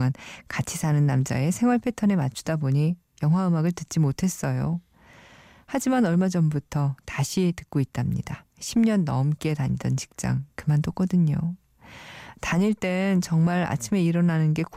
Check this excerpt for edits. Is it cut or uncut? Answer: cut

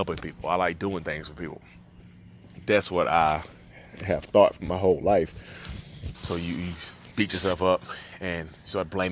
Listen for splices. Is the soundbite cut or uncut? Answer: cut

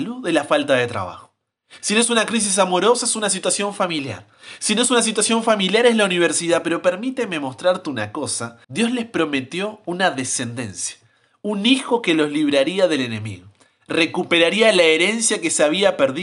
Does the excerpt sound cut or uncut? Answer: cut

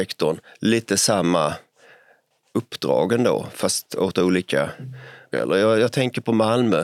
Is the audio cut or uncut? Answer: cut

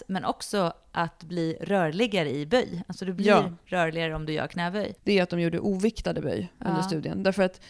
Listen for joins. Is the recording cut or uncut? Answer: cut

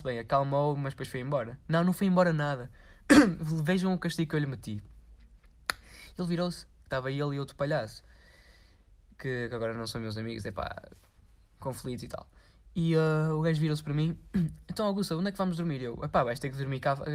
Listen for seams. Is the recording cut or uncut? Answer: cut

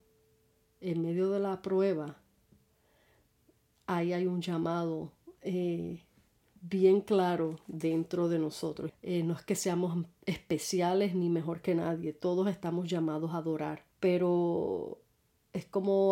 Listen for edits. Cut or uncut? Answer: cut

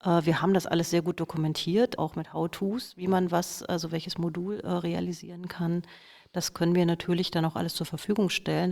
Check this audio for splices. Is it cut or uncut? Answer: cut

